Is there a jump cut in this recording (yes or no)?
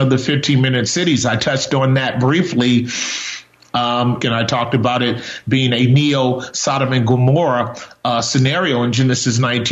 yes